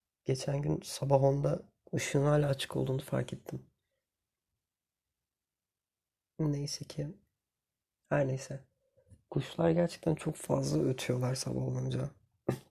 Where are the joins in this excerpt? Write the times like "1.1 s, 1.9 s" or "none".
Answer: none